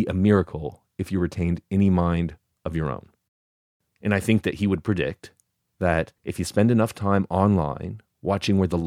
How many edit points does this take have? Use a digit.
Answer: 2